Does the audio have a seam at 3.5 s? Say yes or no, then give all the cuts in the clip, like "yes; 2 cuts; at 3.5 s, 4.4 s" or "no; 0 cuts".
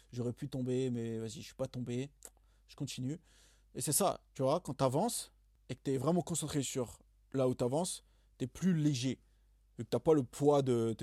no; 0 cuts